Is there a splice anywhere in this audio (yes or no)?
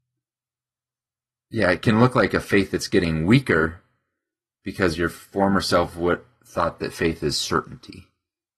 no